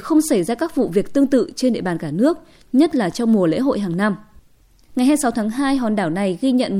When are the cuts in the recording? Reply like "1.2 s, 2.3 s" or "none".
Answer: 4.9 s

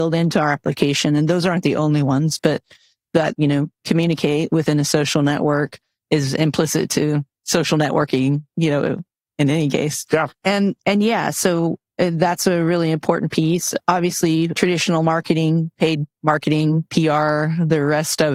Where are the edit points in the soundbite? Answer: 3.3 s

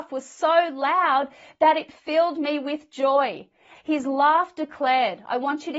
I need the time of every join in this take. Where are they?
3.7 s

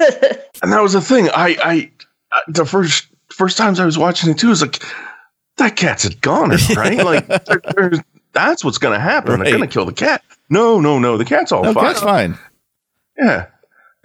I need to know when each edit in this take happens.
none

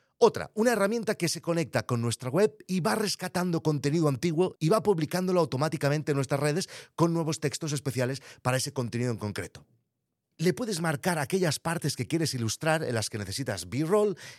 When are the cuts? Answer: 10.3 s

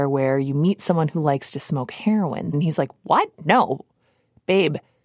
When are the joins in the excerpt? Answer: 2.5 s

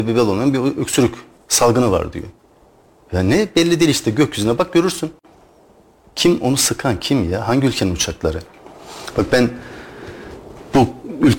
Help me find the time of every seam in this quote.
none

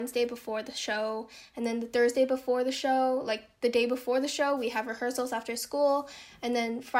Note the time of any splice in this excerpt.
none

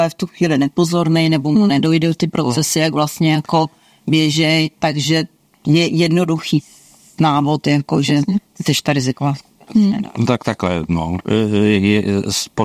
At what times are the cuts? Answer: none

